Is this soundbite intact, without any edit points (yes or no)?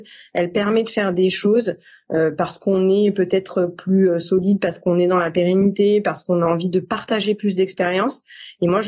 yes